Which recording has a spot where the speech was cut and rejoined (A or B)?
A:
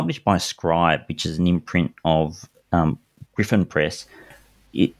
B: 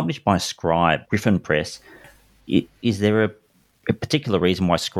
B